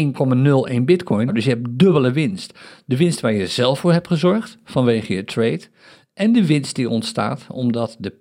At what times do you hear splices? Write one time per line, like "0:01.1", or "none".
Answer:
0:01.3

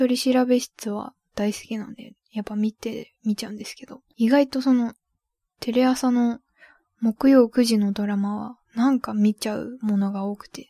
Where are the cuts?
0:08.7

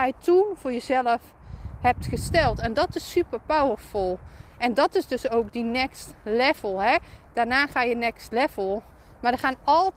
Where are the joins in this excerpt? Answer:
none

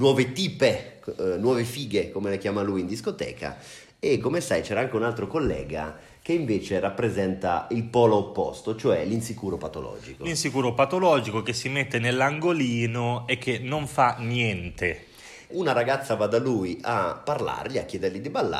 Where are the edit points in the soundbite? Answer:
0:15.5

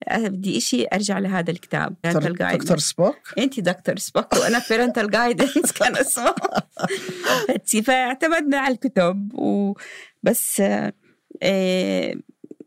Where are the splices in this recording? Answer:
0:02.0

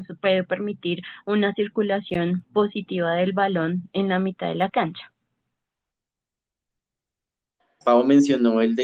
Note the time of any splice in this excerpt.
0:07.8

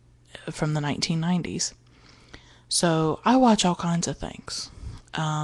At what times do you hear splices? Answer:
none

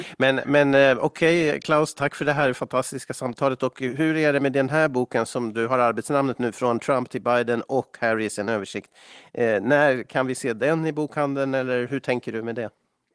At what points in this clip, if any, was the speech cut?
none

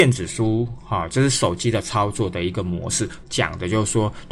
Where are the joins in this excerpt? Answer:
0:03.2

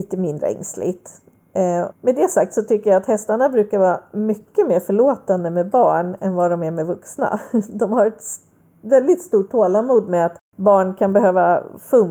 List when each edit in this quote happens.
0:01.9

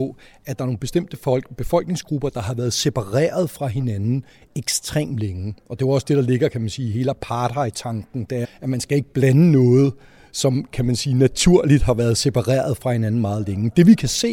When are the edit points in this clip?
0:08.4

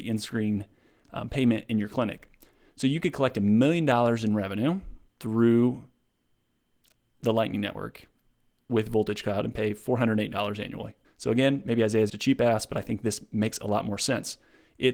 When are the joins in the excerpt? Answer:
0:11.0
0:12.1

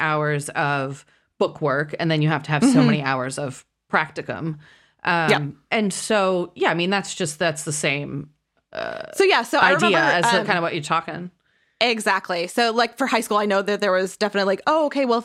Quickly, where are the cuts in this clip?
none

